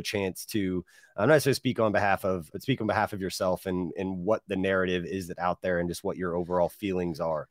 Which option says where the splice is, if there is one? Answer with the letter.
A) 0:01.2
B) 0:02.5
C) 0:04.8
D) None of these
B